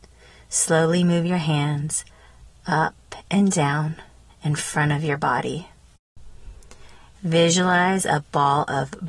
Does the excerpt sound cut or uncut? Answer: cut